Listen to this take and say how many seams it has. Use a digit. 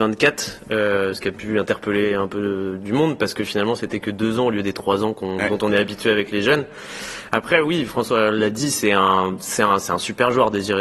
0